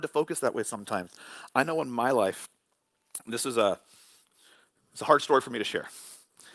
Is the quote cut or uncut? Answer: uncut